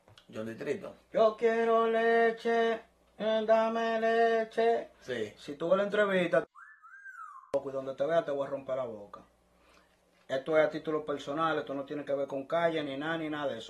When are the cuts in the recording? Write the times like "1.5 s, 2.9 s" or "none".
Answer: none